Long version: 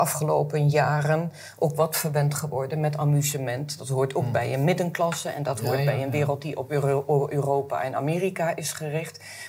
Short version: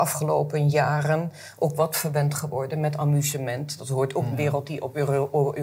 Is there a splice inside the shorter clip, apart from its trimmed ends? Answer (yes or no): yes